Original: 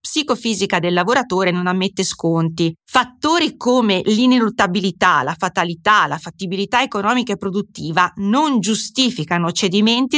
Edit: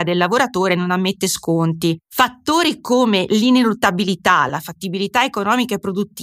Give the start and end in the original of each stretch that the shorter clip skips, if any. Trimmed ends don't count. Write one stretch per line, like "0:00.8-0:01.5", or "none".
0:05.3-0:06.1